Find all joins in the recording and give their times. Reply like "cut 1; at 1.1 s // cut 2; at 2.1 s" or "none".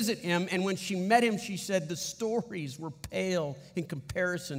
none